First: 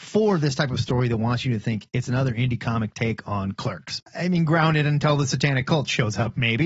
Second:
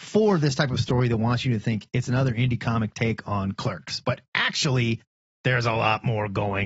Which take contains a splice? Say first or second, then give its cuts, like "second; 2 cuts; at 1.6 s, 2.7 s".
first; 1 cut; at 4.0 s